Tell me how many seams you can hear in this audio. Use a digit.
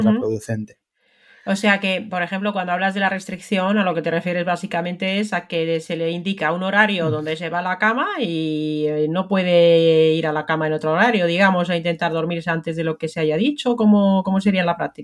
0